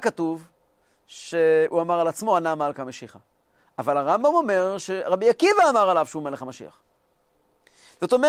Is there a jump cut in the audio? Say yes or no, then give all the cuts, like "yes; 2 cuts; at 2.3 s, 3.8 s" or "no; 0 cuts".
no; 0 cuts